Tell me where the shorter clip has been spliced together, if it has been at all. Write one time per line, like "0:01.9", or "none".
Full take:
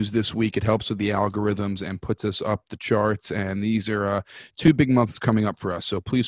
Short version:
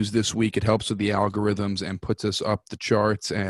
none